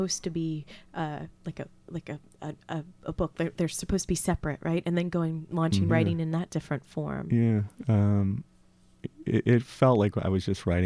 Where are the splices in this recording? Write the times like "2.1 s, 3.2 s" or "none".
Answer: 5.9 s